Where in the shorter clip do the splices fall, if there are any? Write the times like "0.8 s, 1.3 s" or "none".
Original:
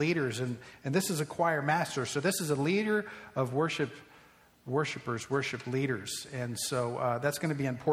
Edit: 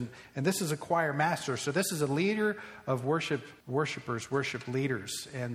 3.6 s